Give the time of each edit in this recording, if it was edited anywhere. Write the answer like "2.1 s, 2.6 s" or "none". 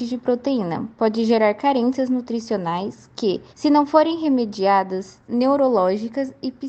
3.5 s, 5.2 s